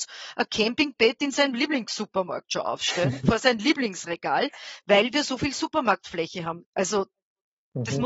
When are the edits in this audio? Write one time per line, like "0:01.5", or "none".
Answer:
0:06.6

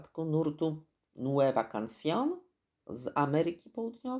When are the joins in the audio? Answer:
none

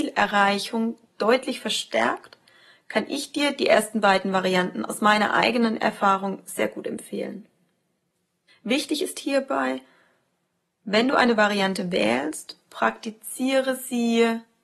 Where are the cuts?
none

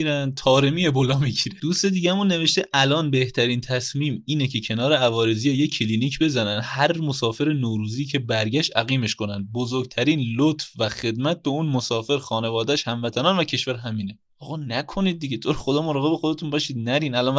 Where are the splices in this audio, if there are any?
none

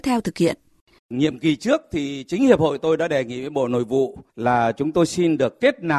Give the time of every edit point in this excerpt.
0:01.0
0:04.3

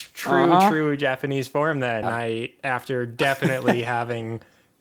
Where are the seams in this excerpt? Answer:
0:02.0

